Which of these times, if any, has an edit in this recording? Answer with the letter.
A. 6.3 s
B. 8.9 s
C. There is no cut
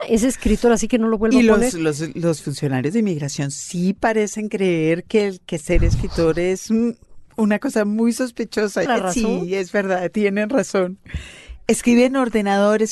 B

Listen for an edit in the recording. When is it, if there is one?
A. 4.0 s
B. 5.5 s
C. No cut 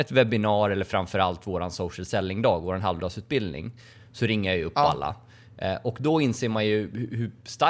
C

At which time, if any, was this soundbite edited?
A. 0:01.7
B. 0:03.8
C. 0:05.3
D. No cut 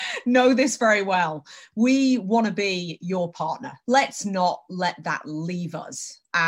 B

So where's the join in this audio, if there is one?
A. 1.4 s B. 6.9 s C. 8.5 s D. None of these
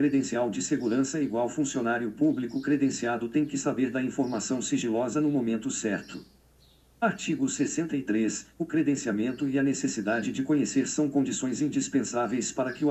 C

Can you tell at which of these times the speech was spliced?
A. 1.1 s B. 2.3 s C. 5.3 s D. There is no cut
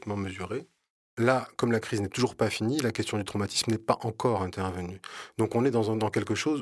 A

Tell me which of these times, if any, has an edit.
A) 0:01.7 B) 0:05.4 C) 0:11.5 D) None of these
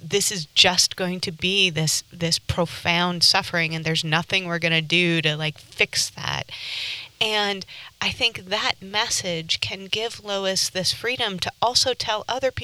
D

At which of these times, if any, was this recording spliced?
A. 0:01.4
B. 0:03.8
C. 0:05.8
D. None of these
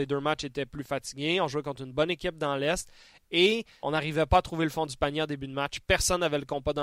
B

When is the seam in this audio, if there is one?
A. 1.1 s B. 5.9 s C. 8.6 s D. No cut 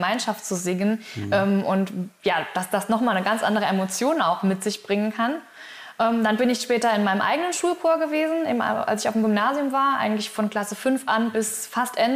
D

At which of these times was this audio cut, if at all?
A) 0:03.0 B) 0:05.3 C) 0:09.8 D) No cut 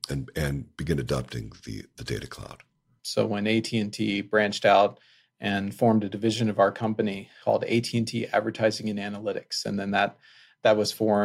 A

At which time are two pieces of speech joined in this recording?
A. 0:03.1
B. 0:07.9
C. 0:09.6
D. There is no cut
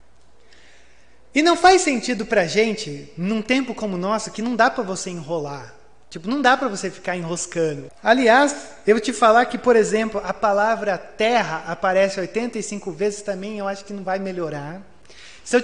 B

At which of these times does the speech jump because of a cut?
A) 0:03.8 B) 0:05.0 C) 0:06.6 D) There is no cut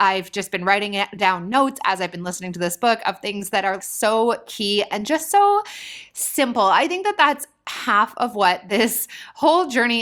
A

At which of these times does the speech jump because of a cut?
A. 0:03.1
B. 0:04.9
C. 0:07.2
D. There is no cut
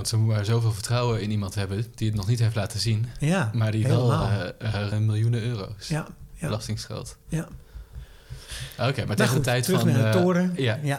B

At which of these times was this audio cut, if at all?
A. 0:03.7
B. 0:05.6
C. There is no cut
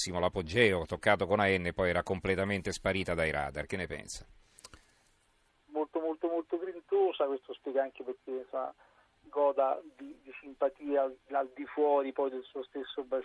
B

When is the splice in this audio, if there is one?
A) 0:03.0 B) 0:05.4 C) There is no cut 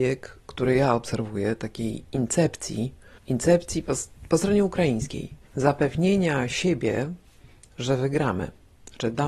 B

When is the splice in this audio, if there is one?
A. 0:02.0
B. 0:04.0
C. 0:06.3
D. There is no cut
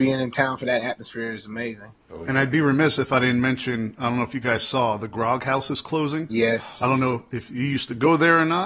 A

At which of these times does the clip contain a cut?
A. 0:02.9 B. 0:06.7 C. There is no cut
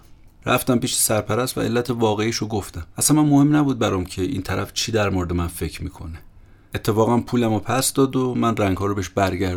A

